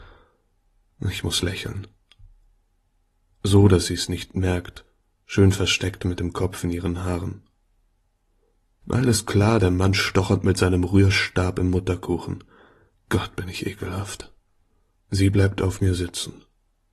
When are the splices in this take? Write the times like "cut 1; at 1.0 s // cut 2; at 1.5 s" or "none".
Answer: cut 1; at 8.8 s // cut 2; at 15.0 s